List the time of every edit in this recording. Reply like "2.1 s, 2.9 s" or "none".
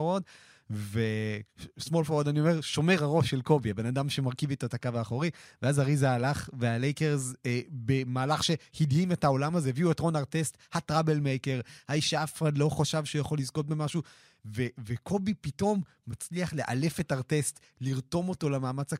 none